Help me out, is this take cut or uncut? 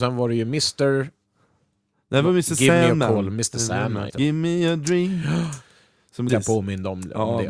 cut